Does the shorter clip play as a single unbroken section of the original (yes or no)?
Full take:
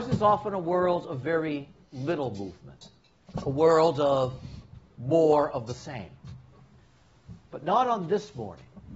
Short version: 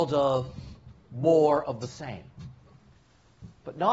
yes